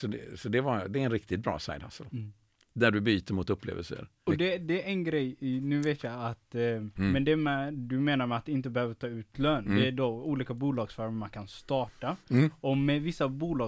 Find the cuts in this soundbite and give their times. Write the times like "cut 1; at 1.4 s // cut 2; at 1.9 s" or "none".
cut 1; at 6.9 s